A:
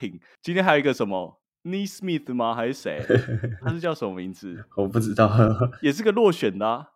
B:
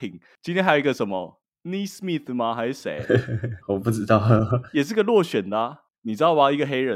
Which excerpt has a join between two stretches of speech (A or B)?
B